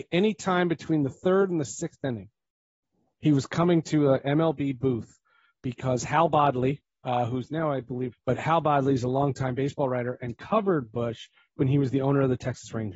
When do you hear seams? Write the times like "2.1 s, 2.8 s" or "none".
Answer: 8.1 s